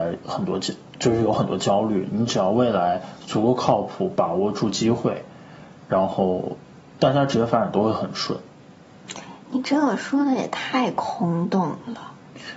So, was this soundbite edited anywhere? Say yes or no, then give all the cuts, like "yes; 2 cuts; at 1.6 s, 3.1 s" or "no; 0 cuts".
no; 0 cuts